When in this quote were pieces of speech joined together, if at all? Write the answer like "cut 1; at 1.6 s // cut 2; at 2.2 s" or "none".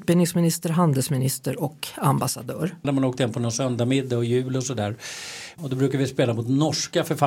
cut 1; at 2.8 s // cut 2; at 5.6 s